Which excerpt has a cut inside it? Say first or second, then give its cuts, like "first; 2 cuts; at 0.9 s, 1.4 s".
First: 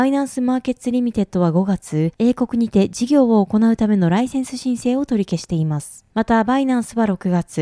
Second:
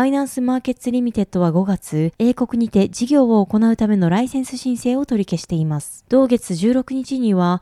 second; 1 cut; at 6.1 s